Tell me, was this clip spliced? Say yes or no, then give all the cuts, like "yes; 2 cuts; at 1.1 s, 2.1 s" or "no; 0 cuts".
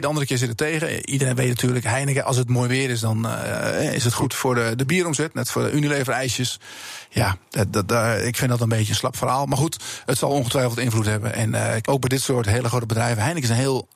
yes; 1 cut; at 11.8 s